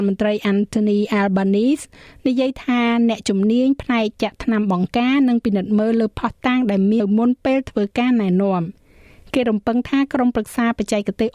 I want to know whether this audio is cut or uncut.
cut